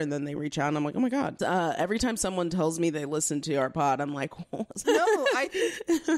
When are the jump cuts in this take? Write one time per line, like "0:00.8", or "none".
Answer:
0:01.4
0:04.8